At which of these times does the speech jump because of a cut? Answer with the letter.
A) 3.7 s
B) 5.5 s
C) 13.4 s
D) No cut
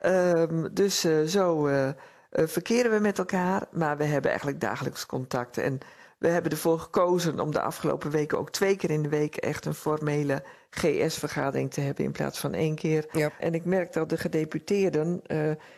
C